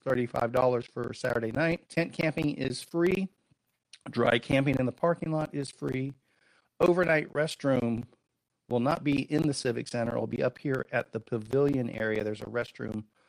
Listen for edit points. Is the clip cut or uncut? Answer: cut